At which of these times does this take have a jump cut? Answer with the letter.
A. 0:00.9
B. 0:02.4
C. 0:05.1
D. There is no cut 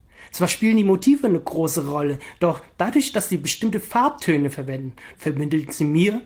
C